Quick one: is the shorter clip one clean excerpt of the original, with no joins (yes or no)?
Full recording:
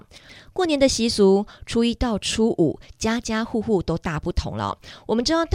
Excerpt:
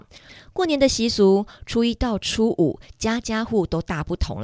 no